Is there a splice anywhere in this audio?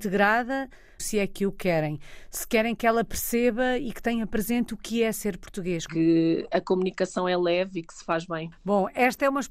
yes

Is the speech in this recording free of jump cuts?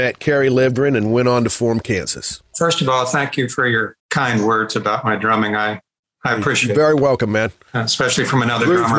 no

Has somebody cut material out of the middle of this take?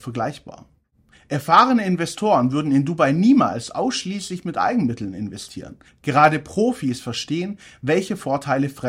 yes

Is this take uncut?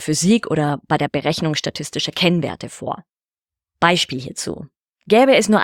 yes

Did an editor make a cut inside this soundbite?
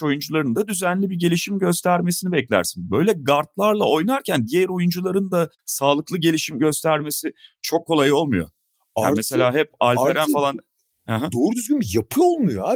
yes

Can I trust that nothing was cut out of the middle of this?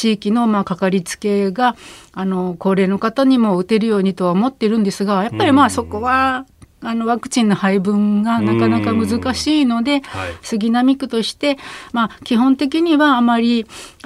yes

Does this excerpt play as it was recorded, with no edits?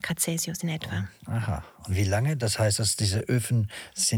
yes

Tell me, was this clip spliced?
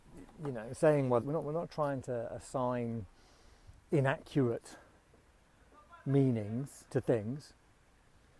yes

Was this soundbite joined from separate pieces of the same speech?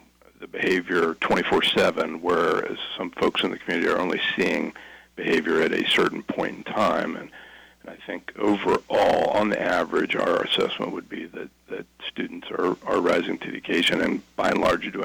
no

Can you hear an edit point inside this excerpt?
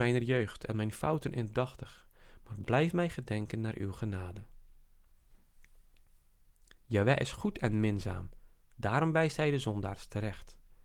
no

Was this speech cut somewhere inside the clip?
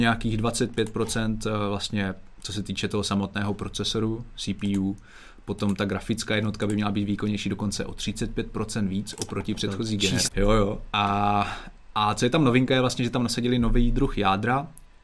yes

